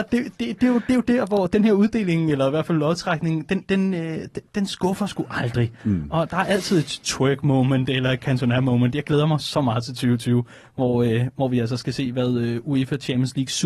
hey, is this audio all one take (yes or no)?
yes